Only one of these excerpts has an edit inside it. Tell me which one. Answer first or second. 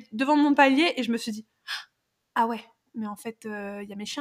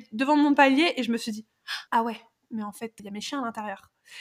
second